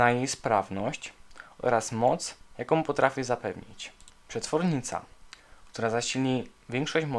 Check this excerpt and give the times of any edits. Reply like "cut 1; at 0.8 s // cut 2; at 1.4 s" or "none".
none